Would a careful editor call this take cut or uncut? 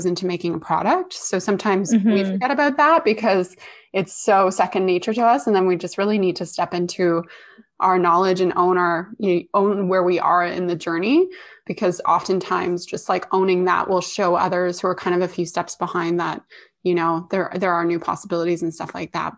uncut